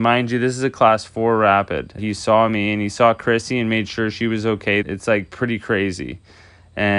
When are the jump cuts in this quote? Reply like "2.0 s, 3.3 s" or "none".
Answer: 2.0 s, 4.8 s